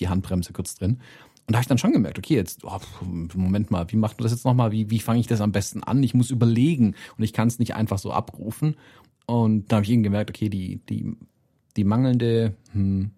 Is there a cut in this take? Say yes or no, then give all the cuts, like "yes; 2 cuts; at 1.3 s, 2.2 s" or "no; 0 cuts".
no; 0 cuts